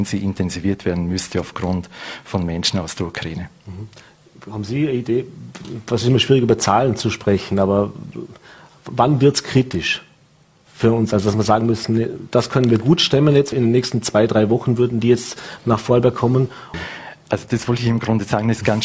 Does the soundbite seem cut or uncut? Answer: cut